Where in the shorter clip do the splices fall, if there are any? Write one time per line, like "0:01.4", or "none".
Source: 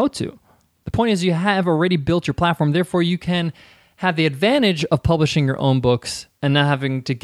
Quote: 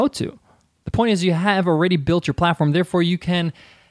none